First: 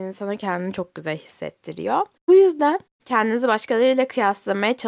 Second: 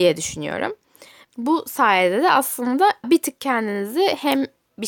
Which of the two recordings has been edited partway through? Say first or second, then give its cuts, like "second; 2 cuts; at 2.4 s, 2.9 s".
second; 2 cuts; at 1.3 s, 3.0 s